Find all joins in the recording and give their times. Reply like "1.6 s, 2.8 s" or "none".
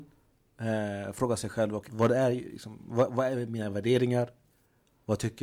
1.9 s